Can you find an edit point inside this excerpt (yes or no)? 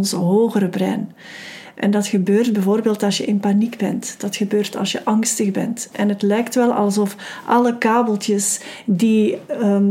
no